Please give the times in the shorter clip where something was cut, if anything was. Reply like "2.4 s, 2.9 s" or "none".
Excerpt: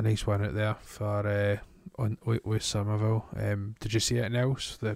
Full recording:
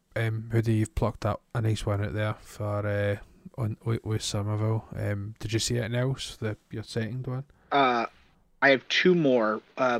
none